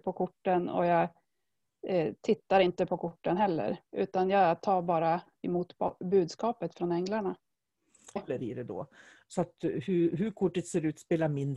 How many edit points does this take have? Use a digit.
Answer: 2